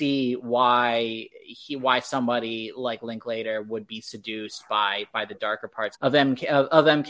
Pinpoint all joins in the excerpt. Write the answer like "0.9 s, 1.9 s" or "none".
5.9 s